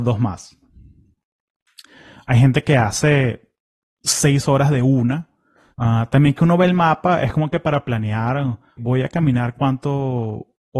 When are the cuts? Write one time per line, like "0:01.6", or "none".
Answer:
0:05.7
0:08.8